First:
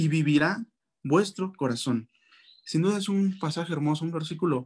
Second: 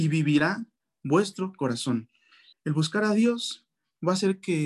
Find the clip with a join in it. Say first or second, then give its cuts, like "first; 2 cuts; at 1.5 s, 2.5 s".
second; 1 cut; at 2.5 s